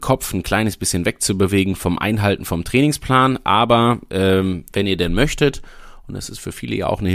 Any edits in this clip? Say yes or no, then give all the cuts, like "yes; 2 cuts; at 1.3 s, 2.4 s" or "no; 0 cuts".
no; 0 cuts